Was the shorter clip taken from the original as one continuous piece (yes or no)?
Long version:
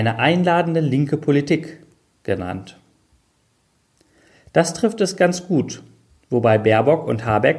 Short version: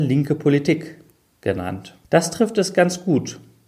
no